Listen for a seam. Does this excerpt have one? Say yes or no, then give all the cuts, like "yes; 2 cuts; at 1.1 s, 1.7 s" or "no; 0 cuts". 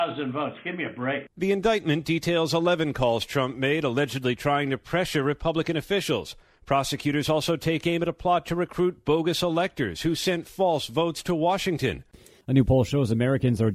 no; 0 cuts